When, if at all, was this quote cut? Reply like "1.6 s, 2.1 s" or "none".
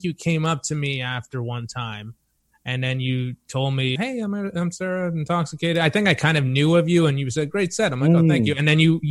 4.0 s